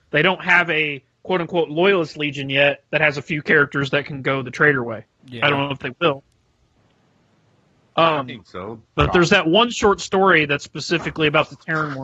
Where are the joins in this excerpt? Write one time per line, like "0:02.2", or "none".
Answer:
0:05.2
0:08.9